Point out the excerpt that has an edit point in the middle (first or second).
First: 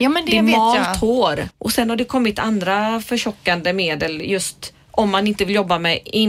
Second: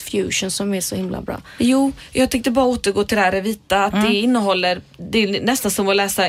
first